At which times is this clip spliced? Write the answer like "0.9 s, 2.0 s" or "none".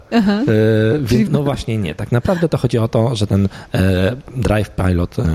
1.3 s